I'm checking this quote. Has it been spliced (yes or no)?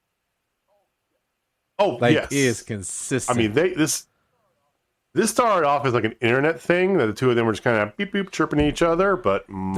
no